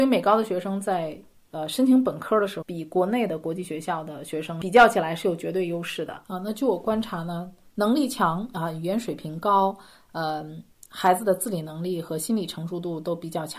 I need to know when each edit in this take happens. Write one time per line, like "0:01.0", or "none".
0:02.6